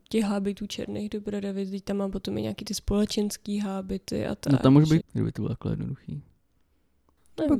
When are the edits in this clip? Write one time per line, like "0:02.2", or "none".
0:05.0